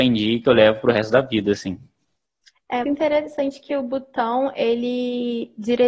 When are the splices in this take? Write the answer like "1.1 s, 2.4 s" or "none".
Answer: 2.8 s